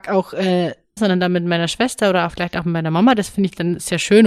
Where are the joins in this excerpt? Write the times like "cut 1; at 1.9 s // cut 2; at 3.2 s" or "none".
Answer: cut 1; at 1.0 s